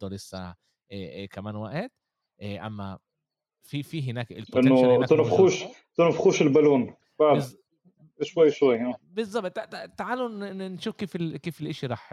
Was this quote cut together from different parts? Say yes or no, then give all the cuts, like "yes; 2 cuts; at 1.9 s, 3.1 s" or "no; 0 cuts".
no; 0 cuts